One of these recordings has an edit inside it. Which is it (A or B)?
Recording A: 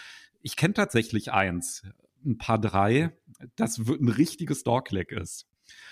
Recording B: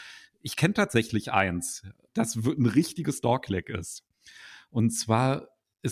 B